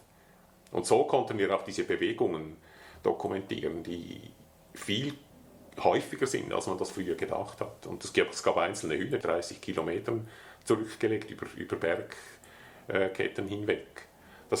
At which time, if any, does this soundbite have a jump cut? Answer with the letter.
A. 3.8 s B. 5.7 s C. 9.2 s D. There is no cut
C